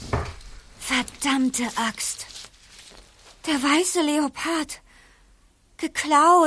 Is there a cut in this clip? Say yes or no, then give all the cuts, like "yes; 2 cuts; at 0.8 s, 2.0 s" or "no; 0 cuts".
no; 0 cuts